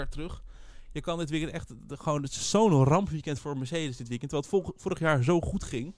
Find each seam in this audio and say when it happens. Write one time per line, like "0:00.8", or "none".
none